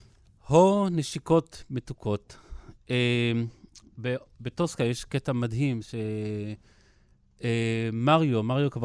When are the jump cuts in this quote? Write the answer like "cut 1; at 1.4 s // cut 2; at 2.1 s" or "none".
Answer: none

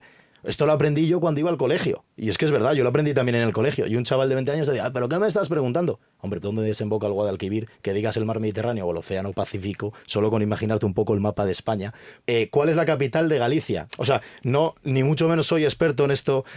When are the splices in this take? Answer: cut 1; at 6.4 s // cut 2; at 12.2 s // cut 3; at 13.9 s

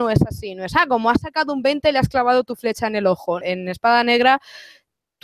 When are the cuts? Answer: cut 1; at 3.4 s

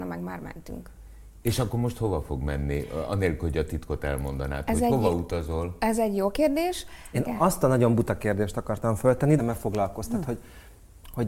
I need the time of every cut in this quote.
cut 1; at 7.1 s // cut 2; at 9.4 s

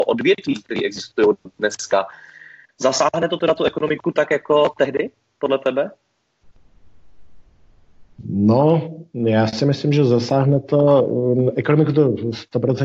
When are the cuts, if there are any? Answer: none

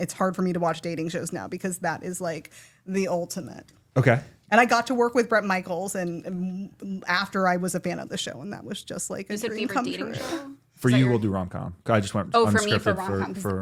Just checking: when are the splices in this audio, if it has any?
none

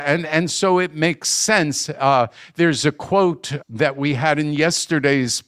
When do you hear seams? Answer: cut 1; at 3.6 s

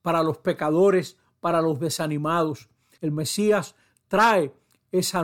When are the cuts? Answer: cut 1; at 3.0 s

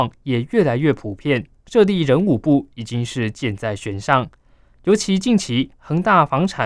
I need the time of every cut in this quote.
cut 1; at 1.6 s

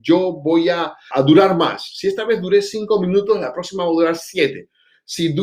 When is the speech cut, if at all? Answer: cut 1; at 1.1 s

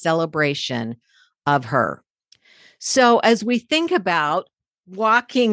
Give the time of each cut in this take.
none

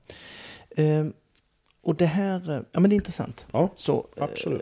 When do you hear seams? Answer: none

